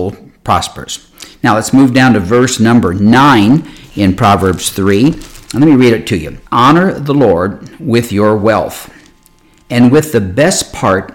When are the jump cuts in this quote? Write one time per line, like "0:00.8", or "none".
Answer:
0:06.5